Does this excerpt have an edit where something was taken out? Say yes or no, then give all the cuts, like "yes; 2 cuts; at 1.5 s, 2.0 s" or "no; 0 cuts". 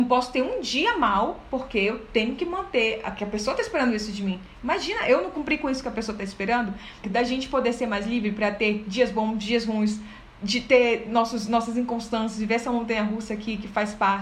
yes; 1 cut; at 7.0 s